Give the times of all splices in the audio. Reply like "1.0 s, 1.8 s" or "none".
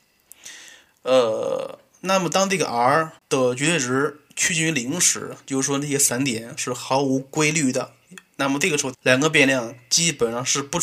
3.2 s, 8.9 s